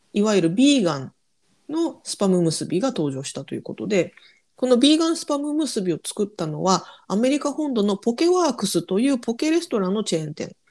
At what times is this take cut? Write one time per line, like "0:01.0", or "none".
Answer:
none

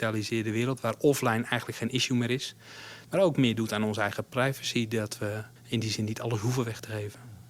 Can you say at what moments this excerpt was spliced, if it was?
0:03.0
0:05.6

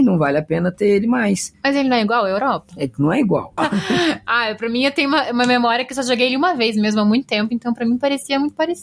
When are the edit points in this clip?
0:03.6

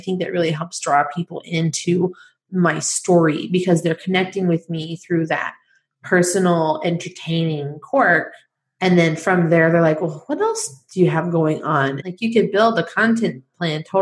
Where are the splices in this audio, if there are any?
0:12.0

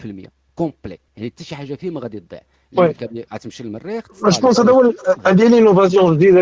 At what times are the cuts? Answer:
0:01.1

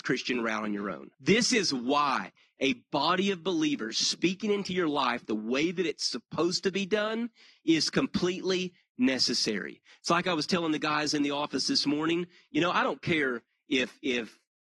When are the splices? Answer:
0:01.1

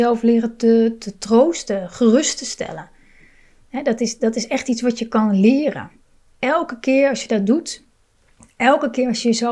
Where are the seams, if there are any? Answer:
none

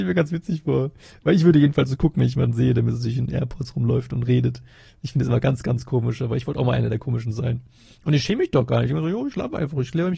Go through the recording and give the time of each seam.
none

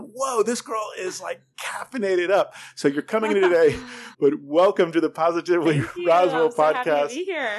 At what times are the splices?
0:04.1

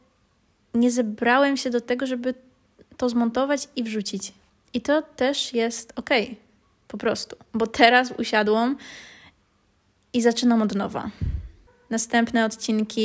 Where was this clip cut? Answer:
none

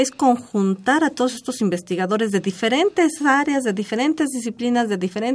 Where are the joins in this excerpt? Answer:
none

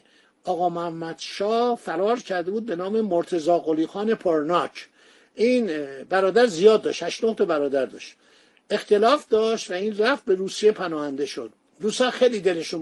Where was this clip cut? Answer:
none

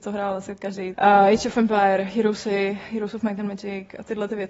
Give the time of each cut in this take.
0:00.9

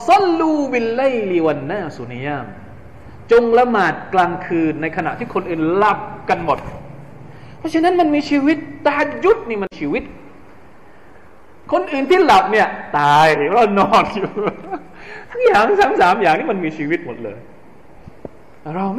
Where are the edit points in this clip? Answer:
none

